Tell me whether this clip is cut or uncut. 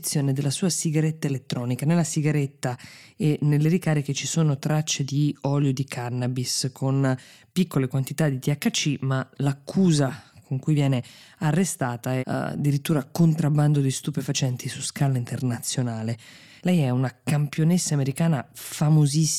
cut